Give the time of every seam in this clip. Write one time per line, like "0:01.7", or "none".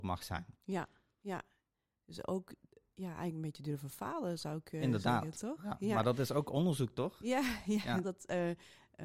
0:08.0